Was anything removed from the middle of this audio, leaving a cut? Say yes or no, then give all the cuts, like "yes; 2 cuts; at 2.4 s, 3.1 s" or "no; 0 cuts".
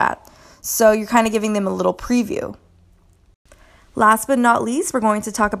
no; 0 cuts